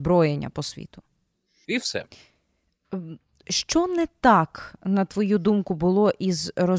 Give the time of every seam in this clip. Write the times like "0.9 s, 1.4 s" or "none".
1.6 s

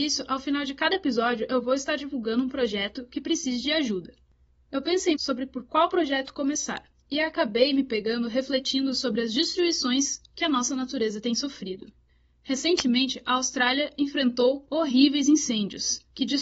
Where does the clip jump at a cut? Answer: 5.1 s

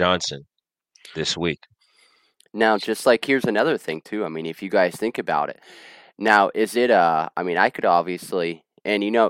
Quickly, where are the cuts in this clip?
none

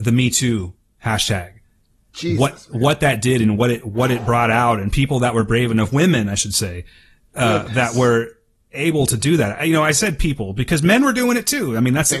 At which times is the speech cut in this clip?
none

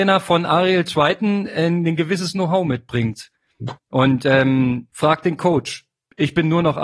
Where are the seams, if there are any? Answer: 3.8 s, 4.9 s

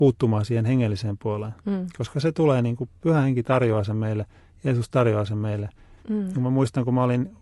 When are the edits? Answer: 6.0 s

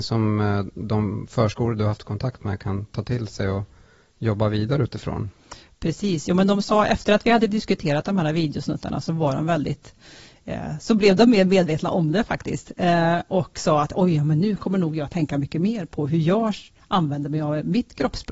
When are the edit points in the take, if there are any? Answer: none

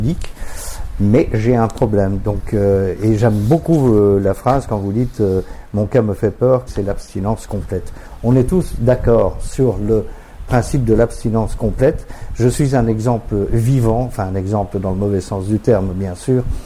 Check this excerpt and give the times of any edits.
6.7 s

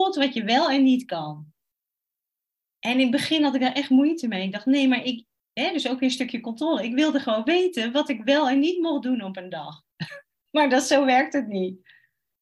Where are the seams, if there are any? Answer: 9.8 s

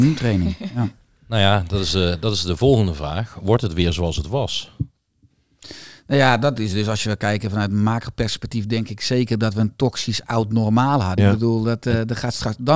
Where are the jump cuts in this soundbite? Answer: 11.2 s

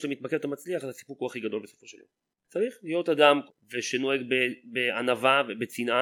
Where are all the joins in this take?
2.4 s, 3.5 s

